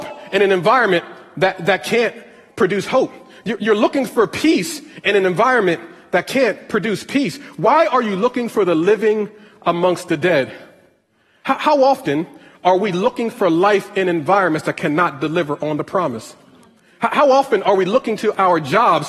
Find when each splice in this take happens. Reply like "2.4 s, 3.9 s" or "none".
none